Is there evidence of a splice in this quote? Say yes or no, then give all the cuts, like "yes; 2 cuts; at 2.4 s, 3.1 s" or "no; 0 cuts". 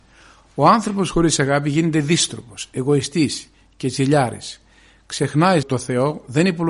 yes; 1 cut; at 5.6 s